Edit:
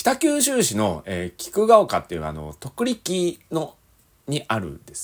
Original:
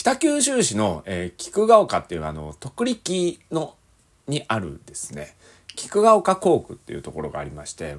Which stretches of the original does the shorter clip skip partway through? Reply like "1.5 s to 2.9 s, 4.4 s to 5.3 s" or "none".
none